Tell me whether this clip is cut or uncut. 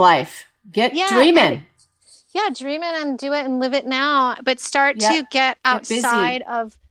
uncut